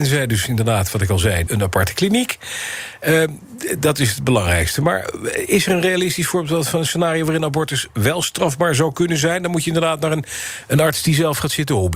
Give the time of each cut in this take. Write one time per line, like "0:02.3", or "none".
0:01.5